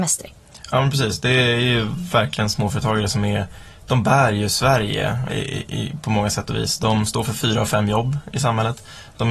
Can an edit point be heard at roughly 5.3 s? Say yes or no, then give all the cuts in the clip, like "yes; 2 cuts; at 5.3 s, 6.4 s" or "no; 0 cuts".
yes; 1 cut; at 5.3 s